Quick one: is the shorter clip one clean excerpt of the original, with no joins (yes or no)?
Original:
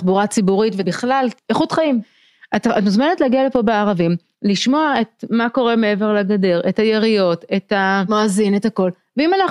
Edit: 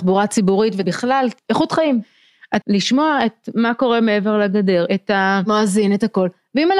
no